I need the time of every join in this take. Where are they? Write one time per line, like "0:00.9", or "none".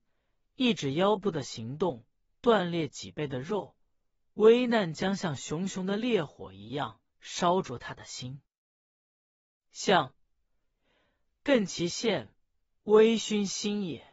none